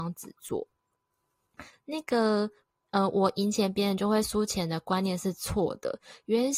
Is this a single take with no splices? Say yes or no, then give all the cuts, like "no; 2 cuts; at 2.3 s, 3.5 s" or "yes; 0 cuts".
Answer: no; 1 cut; at 1.7 s